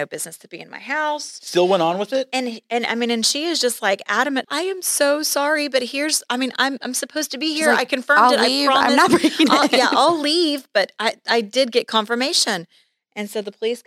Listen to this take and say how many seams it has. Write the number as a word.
one